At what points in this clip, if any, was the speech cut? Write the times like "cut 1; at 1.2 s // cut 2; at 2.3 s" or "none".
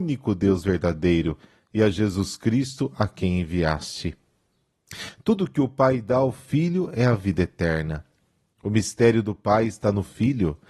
none